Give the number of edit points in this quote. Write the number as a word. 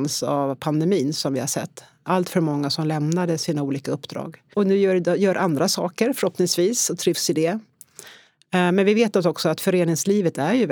one